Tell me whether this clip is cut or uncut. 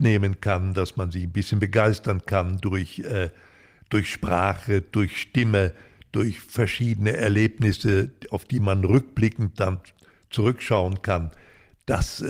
uncut